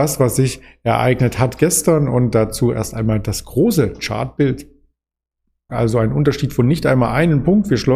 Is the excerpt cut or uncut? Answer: cut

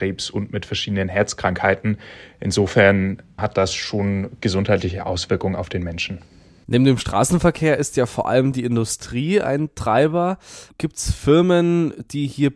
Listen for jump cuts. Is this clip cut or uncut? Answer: cut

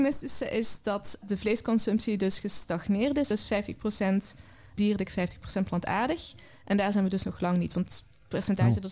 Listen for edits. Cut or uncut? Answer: cut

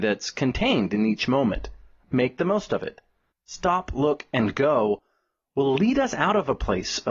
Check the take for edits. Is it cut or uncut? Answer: cut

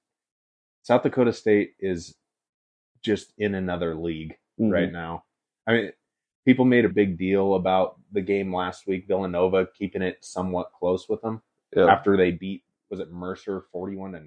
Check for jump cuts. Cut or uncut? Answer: cut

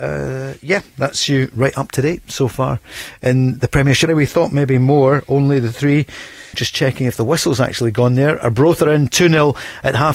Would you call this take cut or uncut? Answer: cut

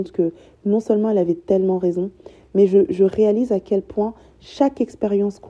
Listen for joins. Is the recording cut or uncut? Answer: uncut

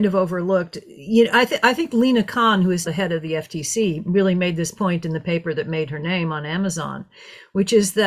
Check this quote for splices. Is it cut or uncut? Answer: cut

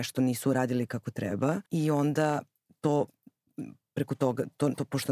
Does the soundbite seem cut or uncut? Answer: cut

